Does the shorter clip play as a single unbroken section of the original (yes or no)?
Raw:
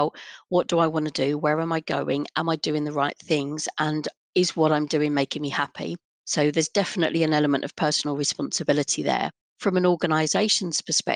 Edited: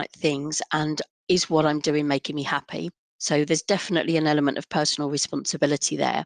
yes